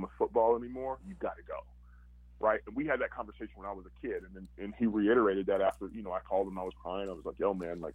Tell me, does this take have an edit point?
no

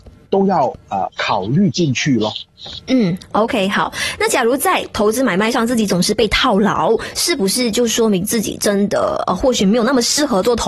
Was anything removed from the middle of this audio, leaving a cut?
no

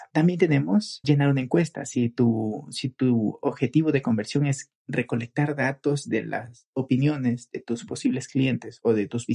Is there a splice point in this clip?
yes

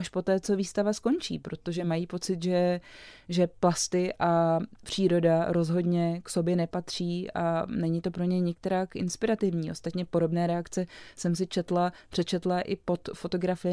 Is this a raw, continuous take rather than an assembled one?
yes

